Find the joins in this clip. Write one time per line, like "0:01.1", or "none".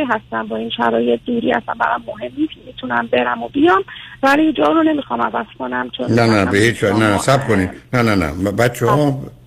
none